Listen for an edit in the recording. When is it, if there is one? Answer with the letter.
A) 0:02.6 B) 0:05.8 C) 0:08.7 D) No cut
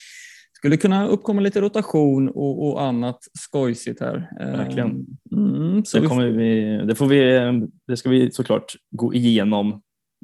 D